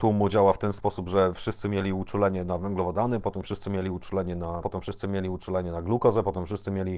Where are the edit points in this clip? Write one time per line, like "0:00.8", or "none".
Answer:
0:03.2
0:04.6